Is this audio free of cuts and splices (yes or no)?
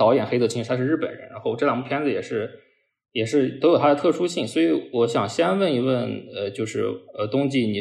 yes